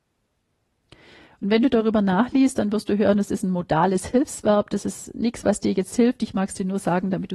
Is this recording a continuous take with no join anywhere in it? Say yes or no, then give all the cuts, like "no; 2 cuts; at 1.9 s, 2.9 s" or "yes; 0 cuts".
yes; 0 cuts